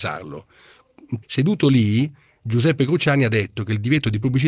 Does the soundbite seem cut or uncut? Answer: cut